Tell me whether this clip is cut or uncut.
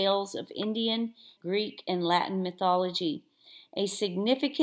cut